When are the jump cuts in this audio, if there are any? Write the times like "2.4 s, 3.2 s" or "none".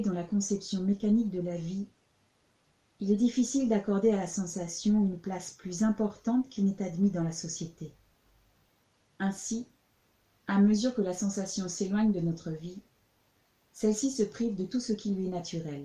none